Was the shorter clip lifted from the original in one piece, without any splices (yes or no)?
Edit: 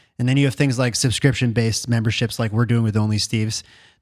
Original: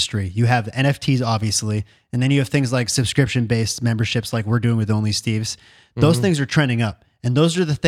yes